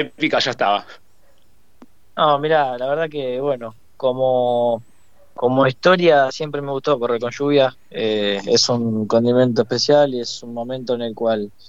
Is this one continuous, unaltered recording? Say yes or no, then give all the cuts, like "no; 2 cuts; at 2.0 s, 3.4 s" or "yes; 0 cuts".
yes; 0 cuts